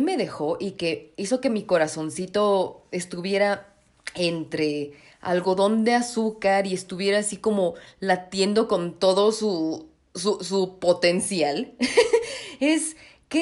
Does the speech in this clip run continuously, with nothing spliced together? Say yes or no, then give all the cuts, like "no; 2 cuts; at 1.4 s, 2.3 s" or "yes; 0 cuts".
yes; 0 cuts